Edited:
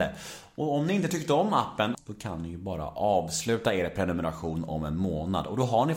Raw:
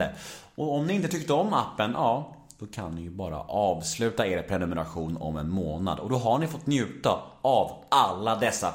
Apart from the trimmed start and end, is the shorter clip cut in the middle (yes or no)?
yes